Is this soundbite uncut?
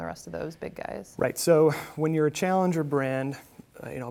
yes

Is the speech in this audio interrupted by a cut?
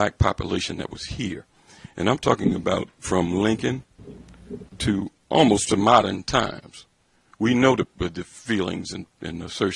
no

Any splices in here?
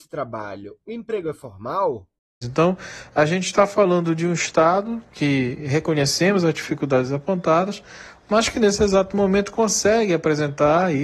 yes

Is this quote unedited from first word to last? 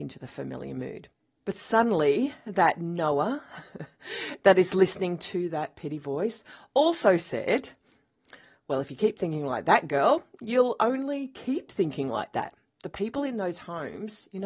yes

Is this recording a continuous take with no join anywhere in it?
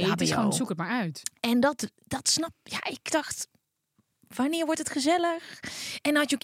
yes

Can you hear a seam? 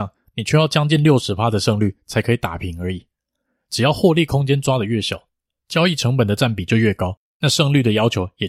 no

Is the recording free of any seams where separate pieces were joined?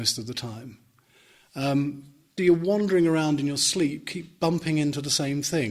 no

